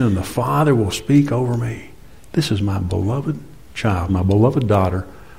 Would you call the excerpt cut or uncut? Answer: cut